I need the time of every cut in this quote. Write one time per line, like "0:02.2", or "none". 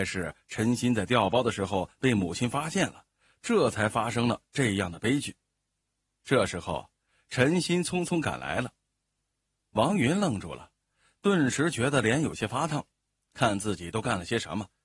0:09.2